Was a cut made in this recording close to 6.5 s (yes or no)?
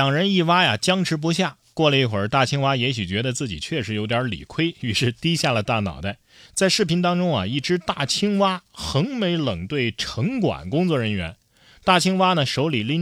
yes